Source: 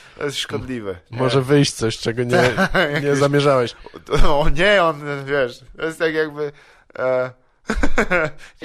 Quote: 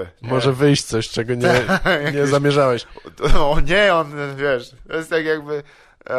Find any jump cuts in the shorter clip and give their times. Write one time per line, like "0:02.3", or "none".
none